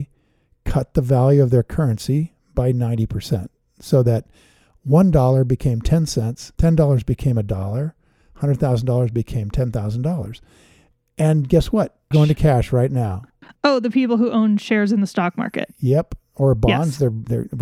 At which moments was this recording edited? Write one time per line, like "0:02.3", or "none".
0:06.5
0:12.1